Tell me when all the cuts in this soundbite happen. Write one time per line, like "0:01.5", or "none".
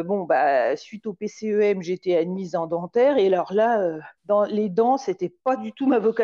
0:04.2